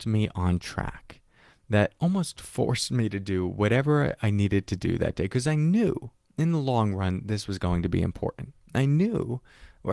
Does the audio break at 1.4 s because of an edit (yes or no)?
no